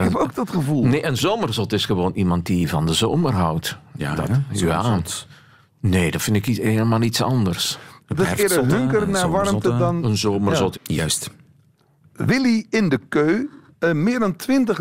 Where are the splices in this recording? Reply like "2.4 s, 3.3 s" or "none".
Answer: 10.7 s, 13.8 s